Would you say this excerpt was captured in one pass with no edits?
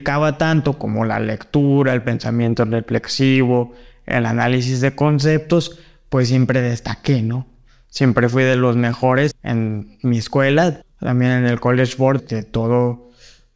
no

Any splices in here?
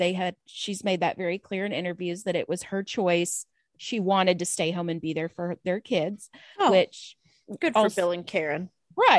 no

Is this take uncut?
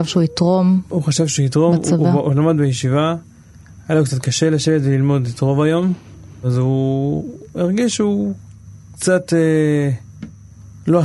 yes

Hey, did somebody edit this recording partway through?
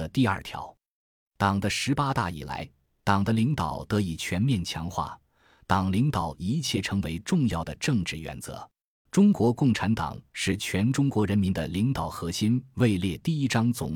yes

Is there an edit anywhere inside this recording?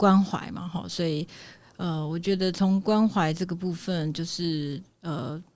no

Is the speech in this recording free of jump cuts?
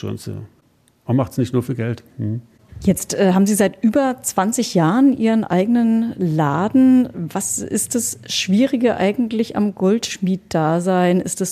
yes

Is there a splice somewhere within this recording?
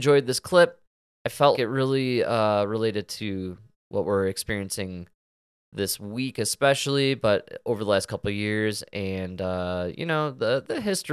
yes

